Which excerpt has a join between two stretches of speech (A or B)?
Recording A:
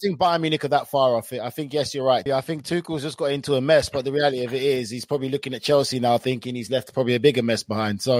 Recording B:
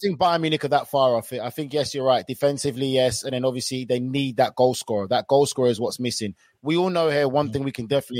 A